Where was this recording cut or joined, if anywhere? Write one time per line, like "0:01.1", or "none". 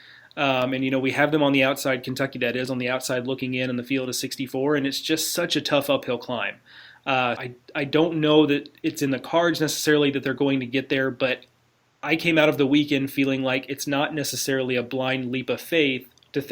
0:07.3